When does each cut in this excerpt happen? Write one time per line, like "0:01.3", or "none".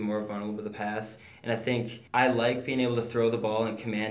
0:02.1